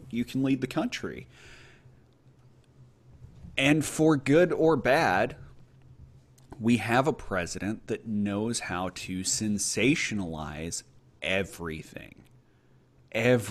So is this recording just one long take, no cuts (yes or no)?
yes